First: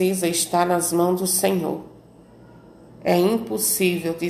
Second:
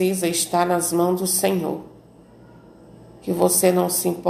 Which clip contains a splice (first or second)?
first